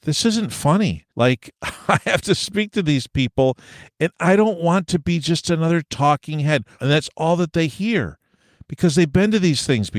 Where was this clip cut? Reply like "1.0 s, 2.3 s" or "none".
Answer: 1.1 s, 6.8 s